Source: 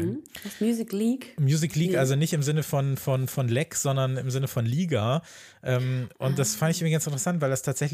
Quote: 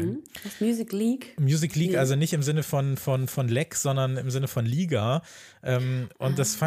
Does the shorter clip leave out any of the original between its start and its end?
no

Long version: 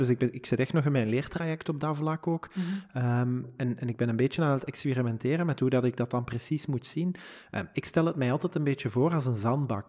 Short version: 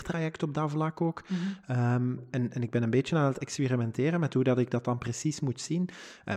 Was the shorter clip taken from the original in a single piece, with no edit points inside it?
yes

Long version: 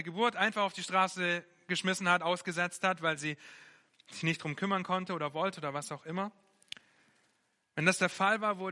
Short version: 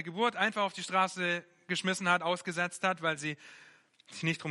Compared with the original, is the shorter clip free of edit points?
yes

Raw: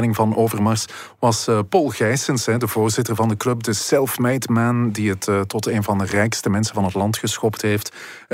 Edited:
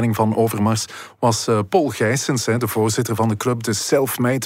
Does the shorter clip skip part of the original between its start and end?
no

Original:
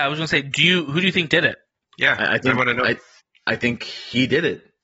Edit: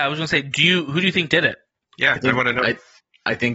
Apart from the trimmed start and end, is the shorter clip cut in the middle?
yes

